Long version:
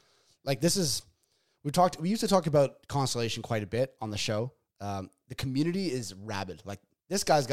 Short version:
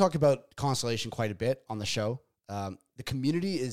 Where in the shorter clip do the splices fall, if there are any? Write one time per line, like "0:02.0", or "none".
none